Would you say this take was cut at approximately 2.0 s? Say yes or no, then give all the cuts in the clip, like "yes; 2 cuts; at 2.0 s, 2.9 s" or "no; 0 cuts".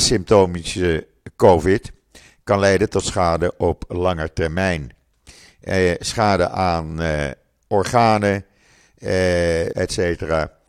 no; 1 cut; at 9.7 s